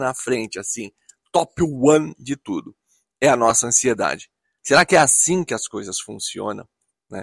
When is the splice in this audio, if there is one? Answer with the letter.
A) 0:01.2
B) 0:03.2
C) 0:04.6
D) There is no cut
C